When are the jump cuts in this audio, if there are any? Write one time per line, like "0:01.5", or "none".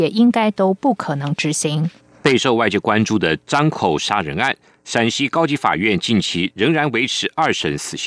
0:02.2
0:03.7